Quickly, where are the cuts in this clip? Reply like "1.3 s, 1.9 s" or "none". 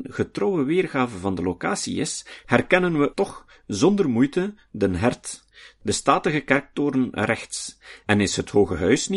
3.1 s